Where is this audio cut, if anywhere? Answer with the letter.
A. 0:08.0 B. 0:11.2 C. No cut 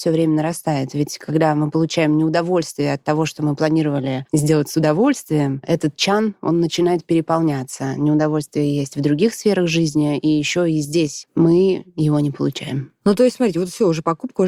B